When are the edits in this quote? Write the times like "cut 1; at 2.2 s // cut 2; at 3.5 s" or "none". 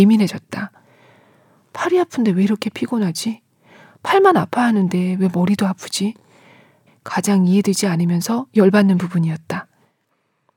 cut 1; at 6.9 s